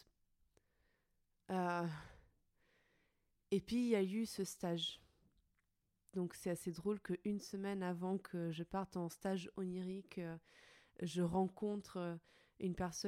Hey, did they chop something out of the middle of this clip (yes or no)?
yes